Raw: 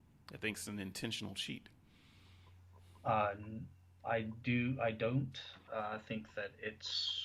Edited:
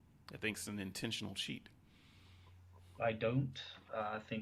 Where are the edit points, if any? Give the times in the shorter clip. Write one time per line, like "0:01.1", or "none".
0:03.0